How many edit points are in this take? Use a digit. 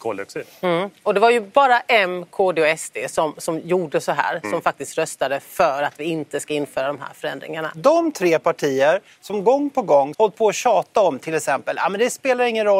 2